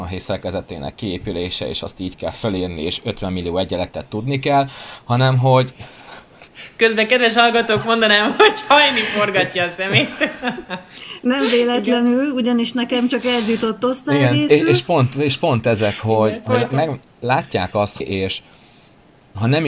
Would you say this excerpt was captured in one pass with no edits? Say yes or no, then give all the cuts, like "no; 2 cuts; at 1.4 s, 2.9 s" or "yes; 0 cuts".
no; 1 cut; at 18.0 s